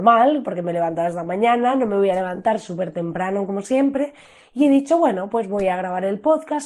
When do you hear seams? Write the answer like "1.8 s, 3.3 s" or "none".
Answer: none

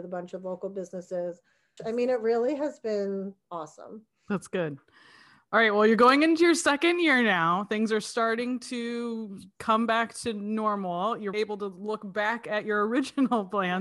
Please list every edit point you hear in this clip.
1.8 s, 11.3 s

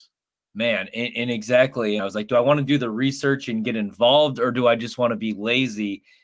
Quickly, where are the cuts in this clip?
2.0 s

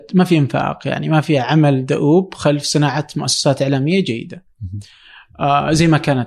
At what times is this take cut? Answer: none

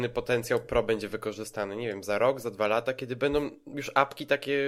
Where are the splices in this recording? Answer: none

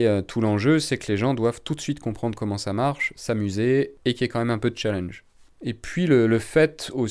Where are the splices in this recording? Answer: 5.5 s

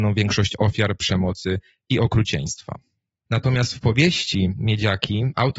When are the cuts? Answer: 3.3 s

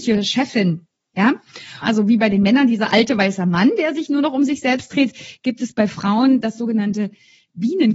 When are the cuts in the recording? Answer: 1.8 s

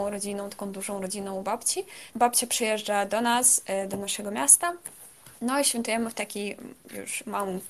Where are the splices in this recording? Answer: 2.1 s

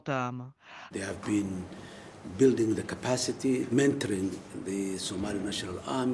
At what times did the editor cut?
0.9 s, 3.7 s

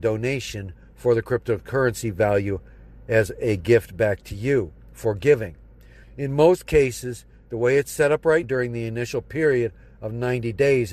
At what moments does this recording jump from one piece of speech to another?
6.0 s, 8.4 s

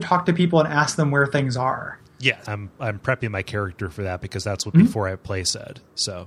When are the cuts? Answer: 2.4 s

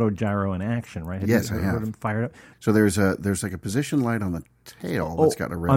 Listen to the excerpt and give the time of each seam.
2.5 s

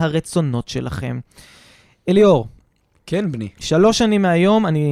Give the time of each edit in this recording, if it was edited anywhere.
3.6 s

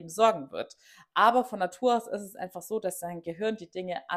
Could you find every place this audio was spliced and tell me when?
none

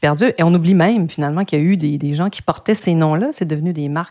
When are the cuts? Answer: none

